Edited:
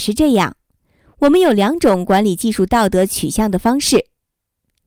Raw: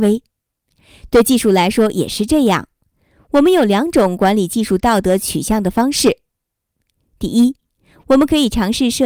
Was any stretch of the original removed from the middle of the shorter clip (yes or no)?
no